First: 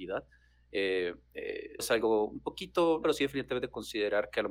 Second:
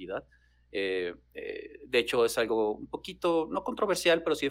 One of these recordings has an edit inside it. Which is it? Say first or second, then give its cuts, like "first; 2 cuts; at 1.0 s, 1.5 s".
first; 2 cuts; at 1.8 s, 3.0 s